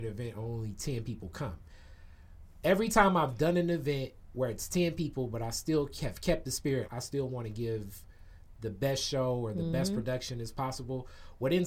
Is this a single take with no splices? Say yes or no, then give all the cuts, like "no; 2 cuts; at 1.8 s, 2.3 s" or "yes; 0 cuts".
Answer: no; 1 cut; at 6.9 s